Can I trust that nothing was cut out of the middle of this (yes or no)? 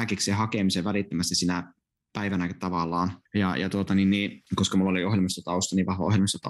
no